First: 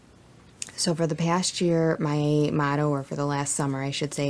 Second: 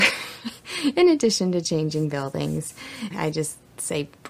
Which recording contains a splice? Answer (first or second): second